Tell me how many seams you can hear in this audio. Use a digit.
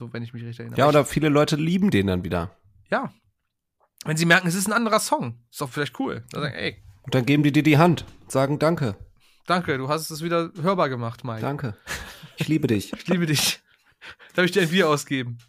0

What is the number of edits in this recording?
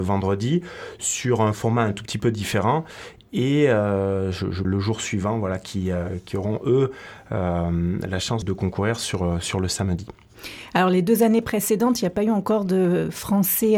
2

